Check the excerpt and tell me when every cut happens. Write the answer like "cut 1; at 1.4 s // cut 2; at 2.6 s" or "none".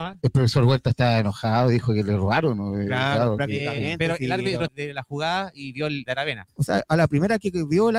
cut 1; at 4.7 s // cut 2; at 6.1 s